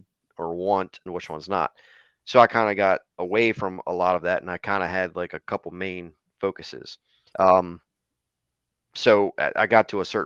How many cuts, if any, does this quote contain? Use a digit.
2